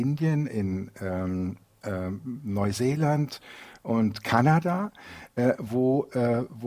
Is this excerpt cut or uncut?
uncut